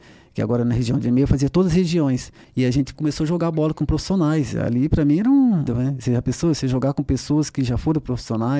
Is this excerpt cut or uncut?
cut